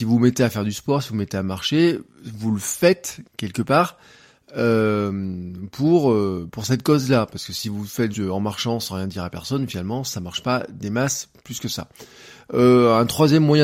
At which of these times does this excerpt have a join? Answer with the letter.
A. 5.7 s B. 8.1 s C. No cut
B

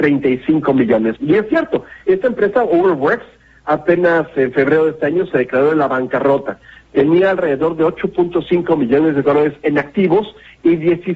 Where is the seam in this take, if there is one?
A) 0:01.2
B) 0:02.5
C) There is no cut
A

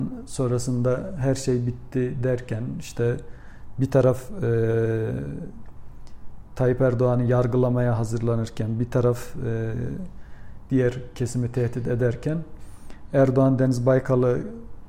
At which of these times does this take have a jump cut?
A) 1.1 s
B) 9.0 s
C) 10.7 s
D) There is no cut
C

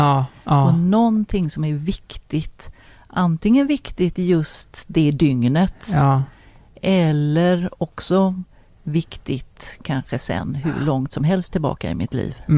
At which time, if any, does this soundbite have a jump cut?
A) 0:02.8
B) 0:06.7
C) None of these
C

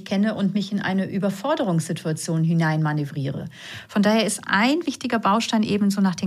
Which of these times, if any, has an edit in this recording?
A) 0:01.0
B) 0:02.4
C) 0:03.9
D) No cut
D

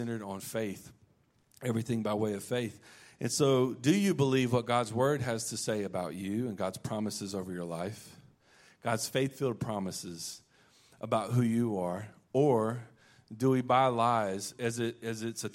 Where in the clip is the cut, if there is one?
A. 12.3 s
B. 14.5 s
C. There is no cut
B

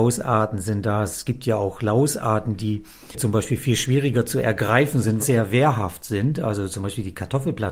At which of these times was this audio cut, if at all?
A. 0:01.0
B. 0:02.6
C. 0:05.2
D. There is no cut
C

